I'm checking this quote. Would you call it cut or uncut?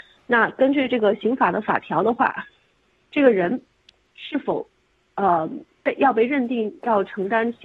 uncut